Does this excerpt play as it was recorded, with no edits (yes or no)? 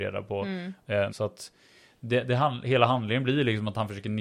no